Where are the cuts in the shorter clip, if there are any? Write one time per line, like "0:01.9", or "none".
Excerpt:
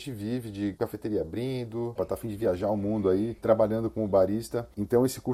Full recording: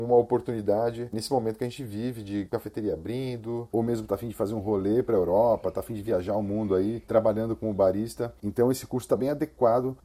0:02.0